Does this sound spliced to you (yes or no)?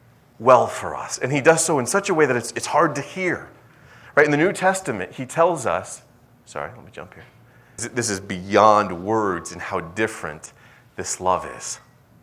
yes